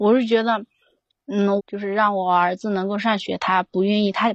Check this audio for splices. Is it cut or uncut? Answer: cut